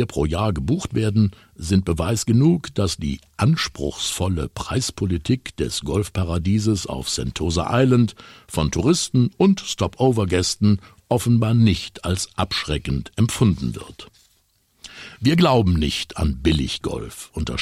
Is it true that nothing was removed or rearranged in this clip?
yes; 0 cuts

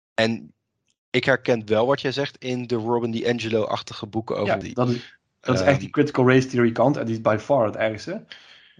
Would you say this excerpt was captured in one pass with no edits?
no; 1 cut; at 4.6 s

